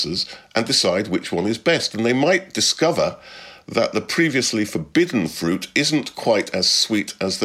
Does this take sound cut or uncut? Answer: uncut